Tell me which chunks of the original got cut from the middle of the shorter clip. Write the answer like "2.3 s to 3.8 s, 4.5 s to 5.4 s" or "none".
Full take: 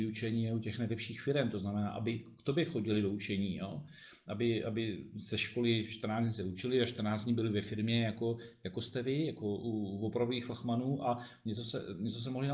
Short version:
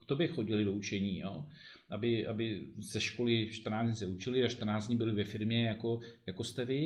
none